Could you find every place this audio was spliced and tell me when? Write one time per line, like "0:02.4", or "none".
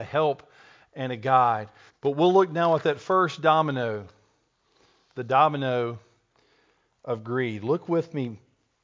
0:01.9